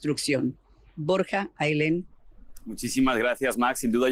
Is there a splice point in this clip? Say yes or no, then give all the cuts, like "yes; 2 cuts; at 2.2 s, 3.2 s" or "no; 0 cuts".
no; 0 cuts